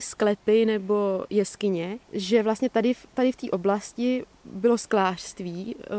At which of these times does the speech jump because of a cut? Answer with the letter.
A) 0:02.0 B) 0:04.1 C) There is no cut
A